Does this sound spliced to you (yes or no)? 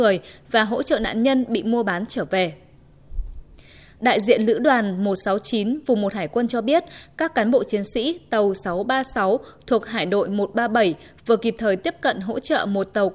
no